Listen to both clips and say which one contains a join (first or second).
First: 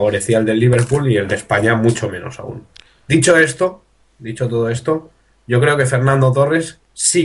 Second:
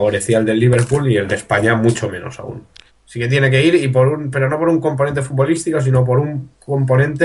second